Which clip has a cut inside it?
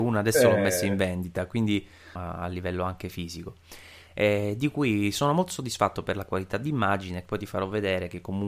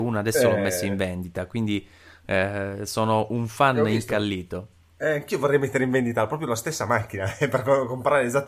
first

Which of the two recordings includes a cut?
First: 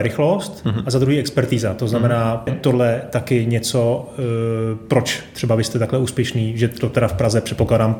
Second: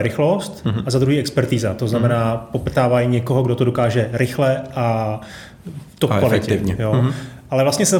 first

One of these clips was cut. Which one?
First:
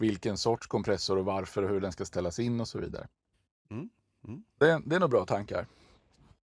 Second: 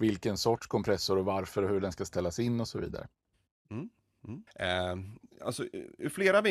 second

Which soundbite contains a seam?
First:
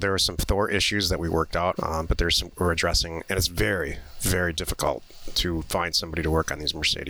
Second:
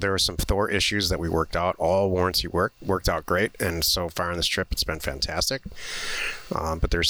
first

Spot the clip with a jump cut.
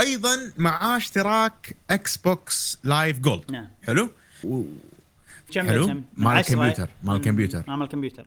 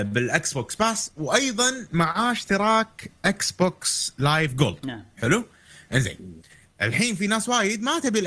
first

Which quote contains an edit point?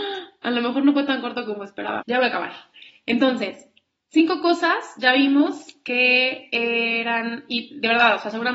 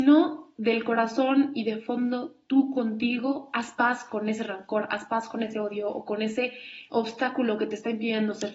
first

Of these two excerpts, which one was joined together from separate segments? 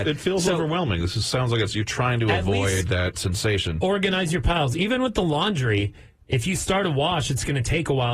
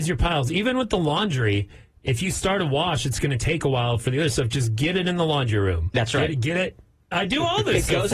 second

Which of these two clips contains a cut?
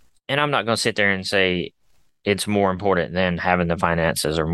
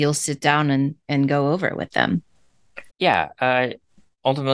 second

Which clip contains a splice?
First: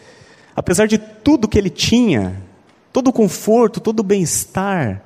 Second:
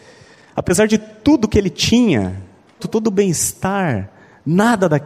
second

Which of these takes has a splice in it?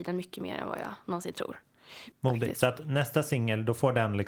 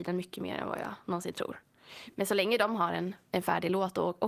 first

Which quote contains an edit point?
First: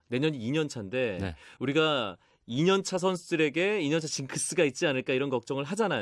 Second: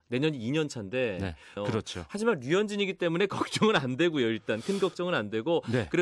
second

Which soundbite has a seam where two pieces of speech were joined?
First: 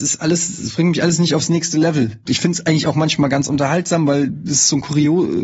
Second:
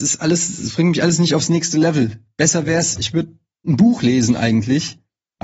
first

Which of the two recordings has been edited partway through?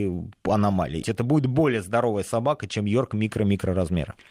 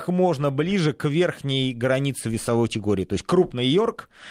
first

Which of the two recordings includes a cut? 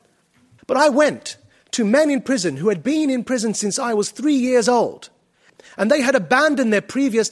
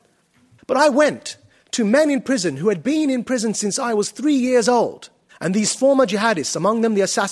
second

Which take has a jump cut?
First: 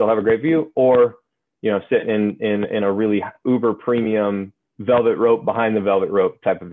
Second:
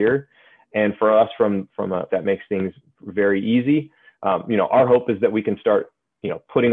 second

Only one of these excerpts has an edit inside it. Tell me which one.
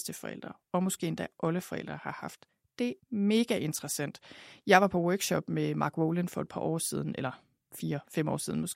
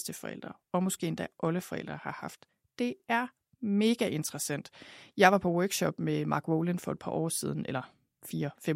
first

